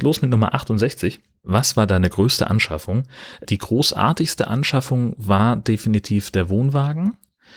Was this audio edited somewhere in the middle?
no; 0 cuts

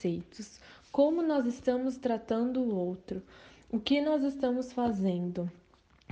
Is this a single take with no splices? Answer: yes; 0 cuts

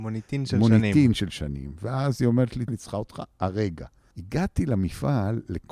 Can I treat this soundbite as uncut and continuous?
no; 2 cuts; at 2.7 s, 4.1 s

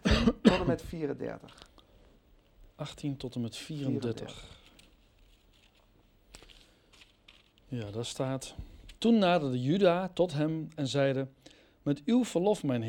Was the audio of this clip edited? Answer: yes; 1 cut; at 9.0 s

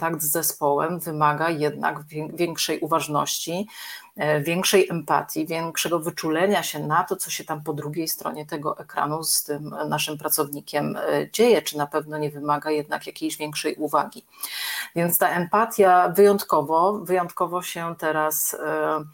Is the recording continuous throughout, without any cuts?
yes; 0 cuts

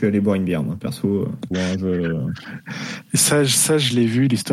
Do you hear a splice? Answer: yes; 1 cut; at 1.5 s

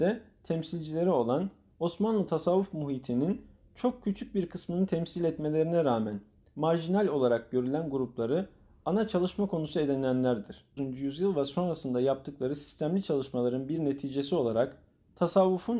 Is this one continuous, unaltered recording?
no; 1 cut; at 10.8 s

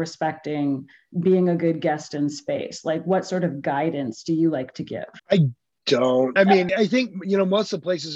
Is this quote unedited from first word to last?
no; 1 cut; at 6.7 s

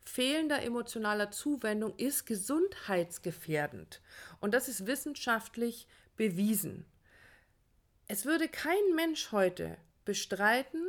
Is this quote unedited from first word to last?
yes; 0 cuts

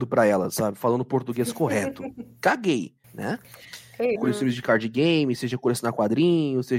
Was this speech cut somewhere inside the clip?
yes; 2 cuts; at 3.0 s, 4.2 s

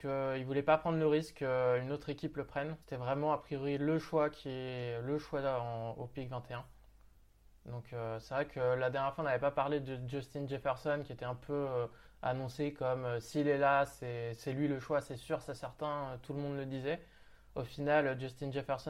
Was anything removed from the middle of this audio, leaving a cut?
yes; 1 cut; at 2.8 s

